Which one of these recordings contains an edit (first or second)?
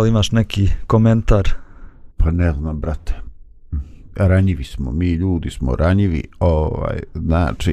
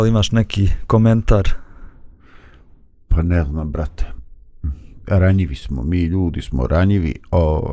first